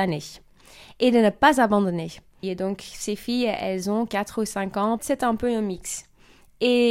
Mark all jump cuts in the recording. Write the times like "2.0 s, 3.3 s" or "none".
2.4 s, 5.0 s